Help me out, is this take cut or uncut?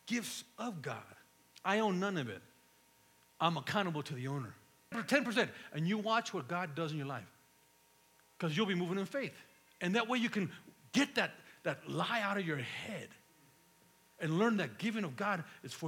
cut